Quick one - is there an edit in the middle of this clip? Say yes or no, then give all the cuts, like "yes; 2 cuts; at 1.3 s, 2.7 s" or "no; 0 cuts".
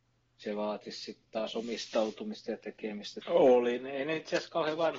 yes; 1 cut; at 3.2 s